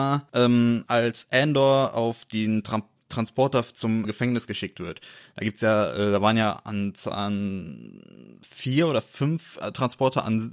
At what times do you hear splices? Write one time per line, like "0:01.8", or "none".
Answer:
0:04.0